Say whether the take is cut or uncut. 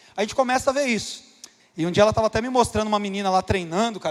cut